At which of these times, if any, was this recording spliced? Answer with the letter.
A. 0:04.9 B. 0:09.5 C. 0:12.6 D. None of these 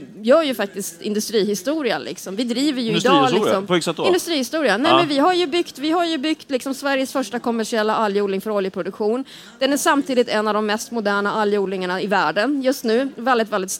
D